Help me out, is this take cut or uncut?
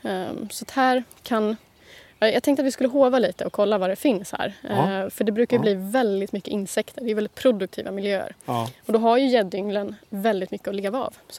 uncut